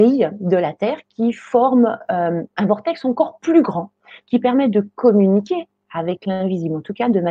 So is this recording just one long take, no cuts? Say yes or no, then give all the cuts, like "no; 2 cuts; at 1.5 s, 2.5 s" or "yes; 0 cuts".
yes; 0 cuts